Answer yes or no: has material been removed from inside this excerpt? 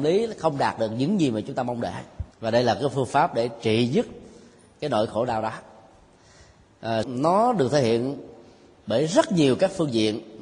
yes